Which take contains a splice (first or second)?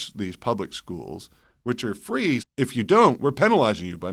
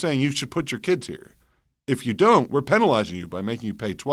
first